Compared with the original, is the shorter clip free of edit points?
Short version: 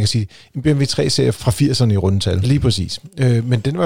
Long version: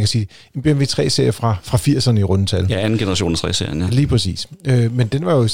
no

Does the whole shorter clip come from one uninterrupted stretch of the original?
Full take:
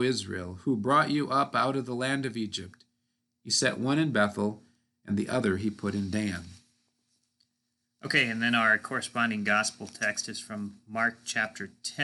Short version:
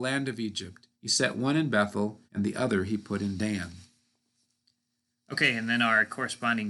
no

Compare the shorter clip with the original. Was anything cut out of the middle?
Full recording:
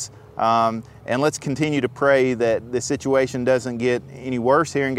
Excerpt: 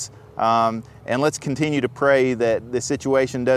no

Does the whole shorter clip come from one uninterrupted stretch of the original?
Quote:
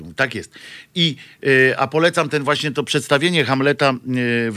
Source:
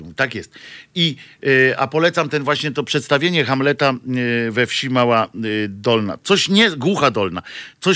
yes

